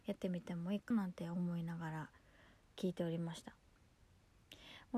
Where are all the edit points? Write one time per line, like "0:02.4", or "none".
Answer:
0:00.9